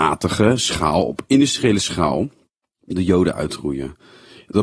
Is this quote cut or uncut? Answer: uncut